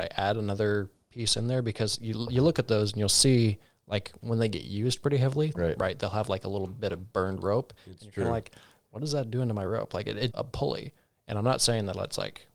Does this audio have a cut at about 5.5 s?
yes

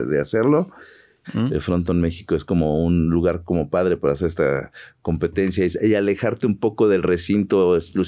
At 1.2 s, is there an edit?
yes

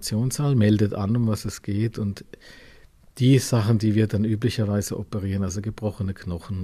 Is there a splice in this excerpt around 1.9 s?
no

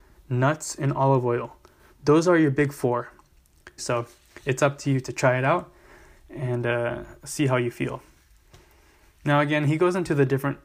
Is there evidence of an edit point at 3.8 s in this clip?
yes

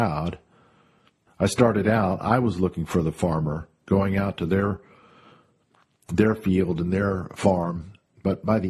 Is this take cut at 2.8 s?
no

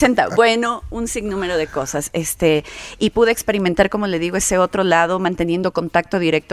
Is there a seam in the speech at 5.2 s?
no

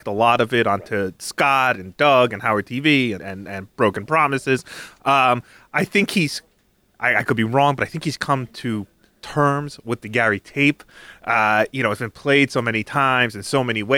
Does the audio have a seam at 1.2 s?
no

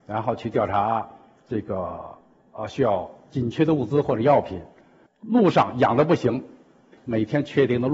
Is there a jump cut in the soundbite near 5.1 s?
no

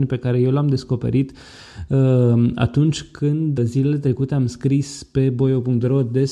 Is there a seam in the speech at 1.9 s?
no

